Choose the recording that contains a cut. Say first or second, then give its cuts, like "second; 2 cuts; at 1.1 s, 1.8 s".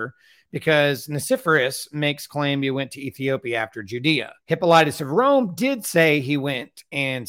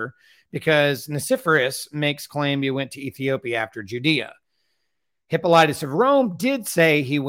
first; 1 cut; at 4.4 s